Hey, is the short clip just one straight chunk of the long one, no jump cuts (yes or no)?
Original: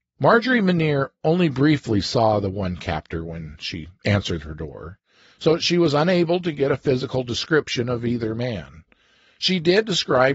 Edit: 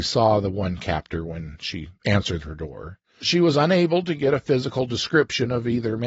no